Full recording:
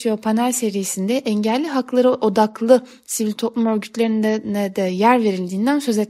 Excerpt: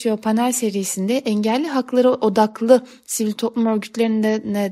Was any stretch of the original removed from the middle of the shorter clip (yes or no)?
no